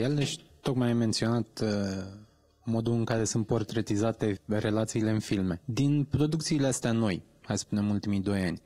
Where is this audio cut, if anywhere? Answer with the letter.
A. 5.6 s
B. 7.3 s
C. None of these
C